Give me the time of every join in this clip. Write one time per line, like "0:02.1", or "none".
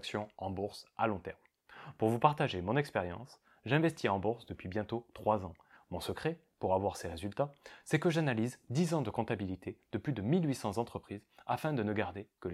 0:05.8